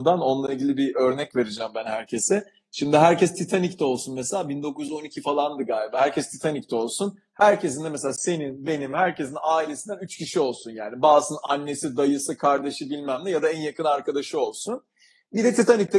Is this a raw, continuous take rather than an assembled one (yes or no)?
yes